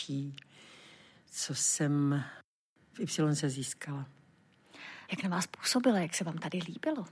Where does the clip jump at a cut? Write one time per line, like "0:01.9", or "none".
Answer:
0:05.1